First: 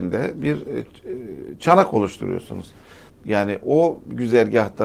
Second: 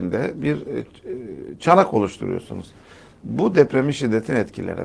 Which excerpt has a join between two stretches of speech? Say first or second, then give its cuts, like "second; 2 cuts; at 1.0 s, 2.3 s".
first; 1 cut; at 3.1 s